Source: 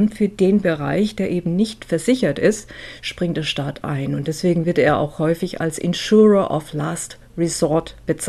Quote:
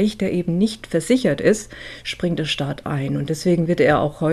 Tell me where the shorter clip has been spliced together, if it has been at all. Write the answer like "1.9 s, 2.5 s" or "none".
none